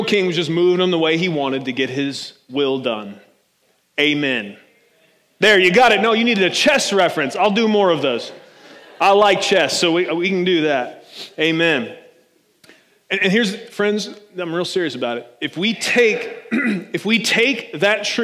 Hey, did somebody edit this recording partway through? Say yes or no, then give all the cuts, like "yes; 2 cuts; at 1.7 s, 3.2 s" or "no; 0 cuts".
yes; 1 cut; at 13.7 s